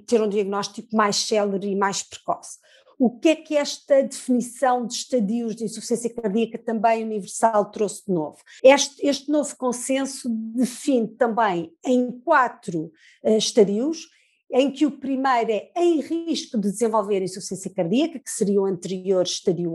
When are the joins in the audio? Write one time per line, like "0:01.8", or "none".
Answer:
0:08.6